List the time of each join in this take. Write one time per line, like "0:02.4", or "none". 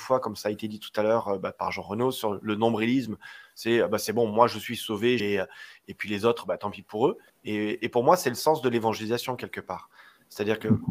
0:05.2
0:07.3